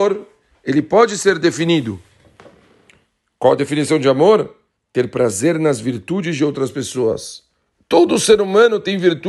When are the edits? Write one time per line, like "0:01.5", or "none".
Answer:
none